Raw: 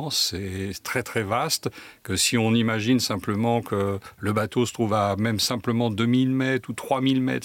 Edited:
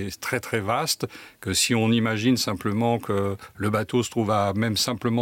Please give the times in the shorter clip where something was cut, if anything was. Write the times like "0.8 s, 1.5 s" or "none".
none